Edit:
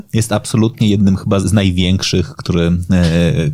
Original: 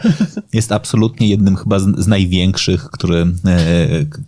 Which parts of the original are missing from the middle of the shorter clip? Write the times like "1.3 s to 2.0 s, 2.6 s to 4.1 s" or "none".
1.8 s to 2.0 s